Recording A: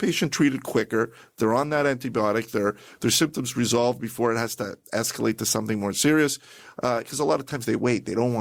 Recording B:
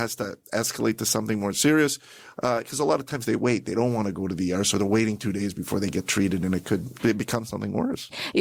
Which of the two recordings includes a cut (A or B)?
B